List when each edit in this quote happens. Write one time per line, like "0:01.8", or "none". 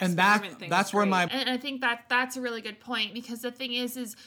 0:01.3